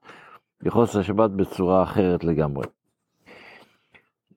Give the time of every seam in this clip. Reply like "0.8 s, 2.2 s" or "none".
none

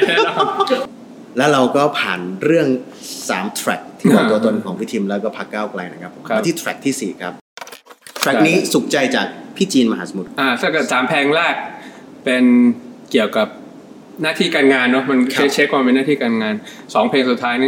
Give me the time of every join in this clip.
none

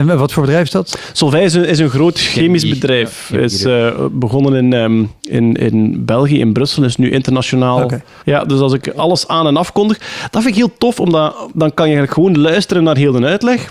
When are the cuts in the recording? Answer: 8.2 s

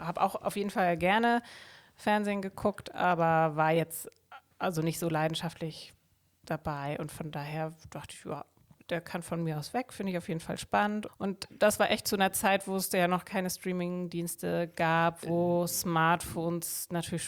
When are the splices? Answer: 11.1 s

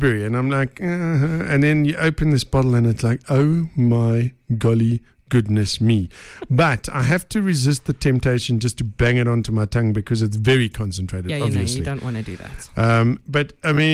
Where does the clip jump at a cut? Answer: none

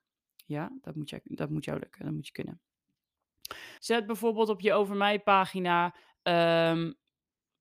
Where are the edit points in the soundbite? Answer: 3.8 s

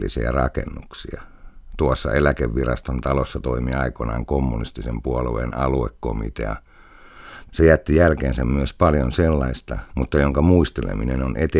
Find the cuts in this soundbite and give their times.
7.5 s, 9.9 s

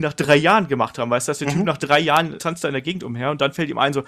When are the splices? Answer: 2.4 s

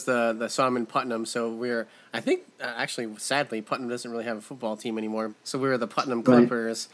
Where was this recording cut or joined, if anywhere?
5.3 s

